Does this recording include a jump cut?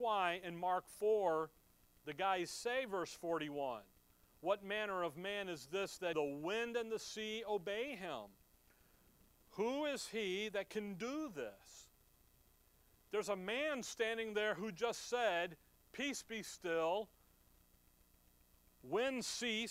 yes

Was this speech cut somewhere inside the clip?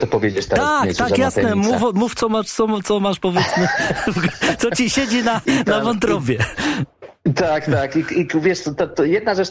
no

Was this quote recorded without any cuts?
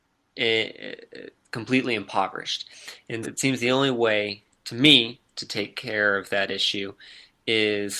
no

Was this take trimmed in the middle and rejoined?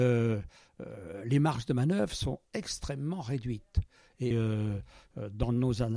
yes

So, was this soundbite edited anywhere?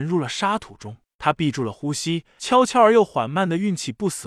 yes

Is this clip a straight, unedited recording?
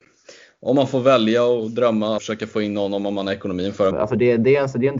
no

